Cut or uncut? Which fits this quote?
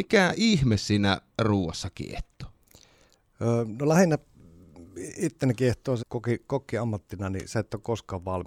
cut